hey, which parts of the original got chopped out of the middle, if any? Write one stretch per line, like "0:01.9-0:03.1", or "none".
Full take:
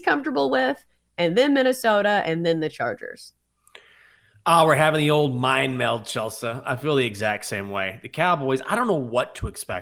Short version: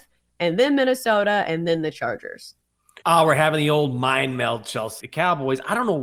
0:03.8-0:04.4
0:06.4-0:08.0